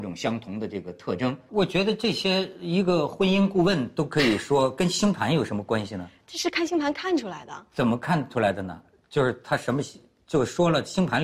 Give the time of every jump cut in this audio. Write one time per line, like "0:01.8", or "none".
0:01.5